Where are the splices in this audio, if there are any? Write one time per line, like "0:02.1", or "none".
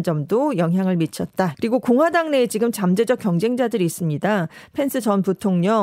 0:01.5

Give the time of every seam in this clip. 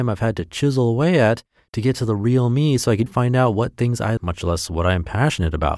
0:03.1
0:04.2

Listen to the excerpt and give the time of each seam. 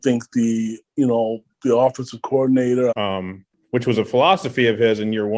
0:02.9

